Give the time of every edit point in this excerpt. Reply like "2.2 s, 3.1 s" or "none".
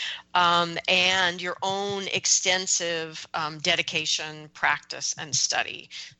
none